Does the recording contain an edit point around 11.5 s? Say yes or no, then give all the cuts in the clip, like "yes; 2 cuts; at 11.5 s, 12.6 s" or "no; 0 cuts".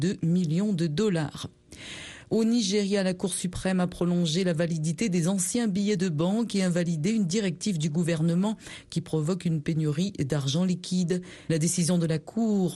yes; 1 cut; at 11.5 s